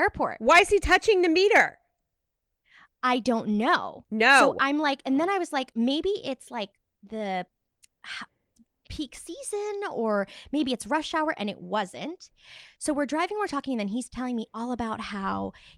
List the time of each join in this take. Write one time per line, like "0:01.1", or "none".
none

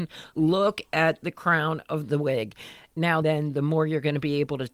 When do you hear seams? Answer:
0:03.2

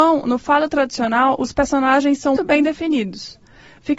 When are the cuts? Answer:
0:02.4

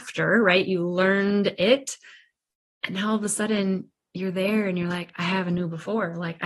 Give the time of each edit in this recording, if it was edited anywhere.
none

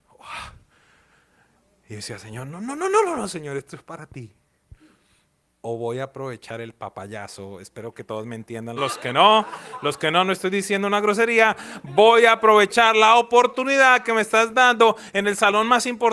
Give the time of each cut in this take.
0:05.4
0:08.8

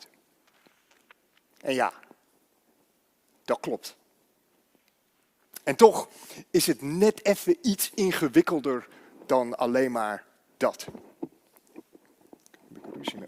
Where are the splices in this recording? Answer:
none

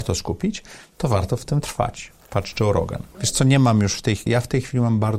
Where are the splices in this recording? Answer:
0:03.1
0:04.3

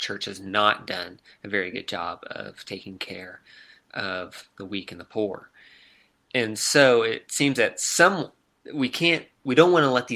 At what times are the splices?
0:07.3

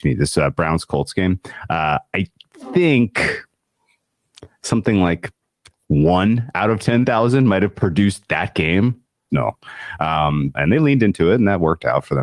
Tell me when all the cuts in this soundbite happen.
0:09.3
0:10.5

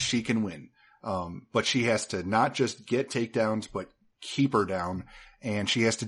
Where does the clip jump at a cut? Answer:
none

